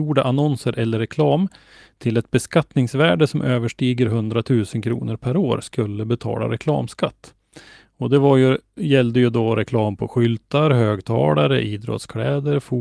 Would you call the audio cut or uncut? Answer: uncut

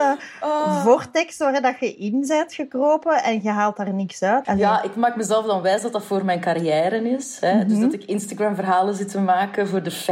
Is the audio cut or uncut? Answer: cut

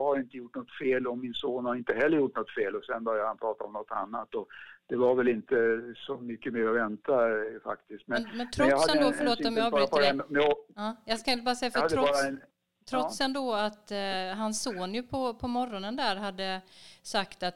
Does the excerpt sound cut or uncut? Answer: uncut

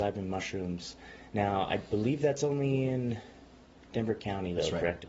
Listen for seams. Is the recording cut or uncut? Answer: uncut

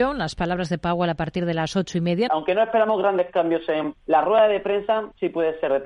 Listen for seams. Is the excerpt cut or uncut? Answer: cut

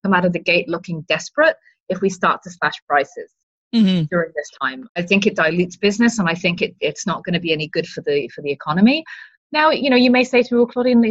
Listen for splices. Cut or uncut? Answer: uncut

